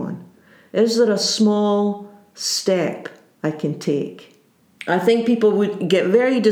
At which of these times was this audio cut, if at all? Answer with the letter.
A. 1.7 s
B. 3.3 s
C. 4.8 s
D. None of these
C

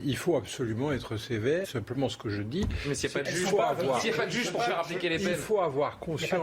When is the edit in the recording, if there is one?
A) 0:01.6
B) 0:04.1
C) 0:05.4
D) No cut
A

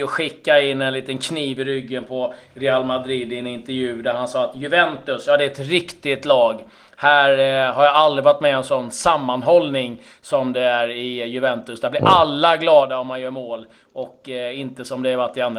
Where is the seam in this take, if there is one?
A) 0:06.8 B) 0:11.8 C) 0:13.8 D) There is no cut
D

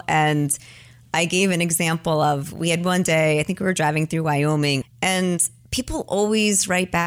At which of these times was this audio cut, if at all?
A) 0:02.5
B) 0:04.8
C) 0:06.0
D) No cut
B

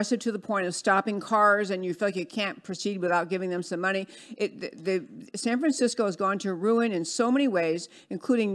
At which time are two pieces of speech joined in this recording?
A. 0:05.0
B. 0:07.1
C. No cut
C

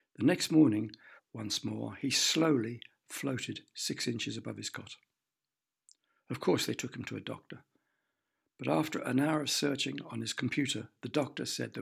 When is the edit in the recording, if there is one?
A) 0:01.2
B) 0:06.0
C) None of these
A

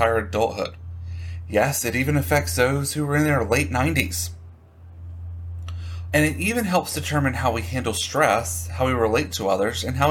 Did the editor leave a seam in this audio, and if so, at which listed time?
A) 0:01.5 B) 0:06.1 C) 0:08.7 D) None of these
B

